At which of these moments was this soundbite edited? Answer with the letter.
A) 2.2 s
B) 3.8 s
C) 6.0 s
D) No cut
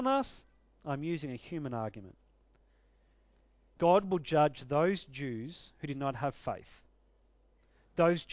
B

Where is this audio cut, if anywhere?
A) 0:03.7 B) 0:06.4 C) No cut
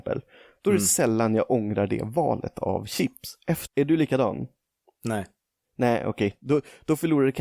A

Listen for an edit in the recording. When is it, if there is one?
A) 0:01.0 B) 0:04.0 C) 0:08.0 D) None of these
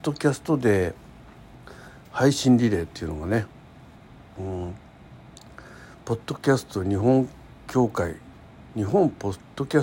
D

